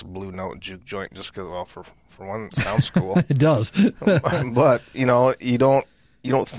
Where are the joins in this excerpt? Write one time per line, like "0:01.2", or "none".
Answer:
none